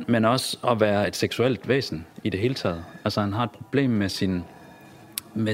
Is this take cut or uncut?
uncut